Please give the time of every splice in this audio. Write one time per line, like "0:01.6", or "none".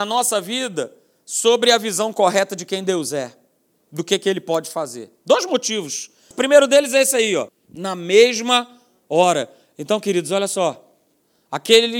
0:06.3
0:07.5